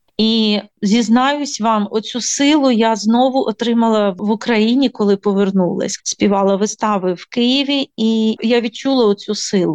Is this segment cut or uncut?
cut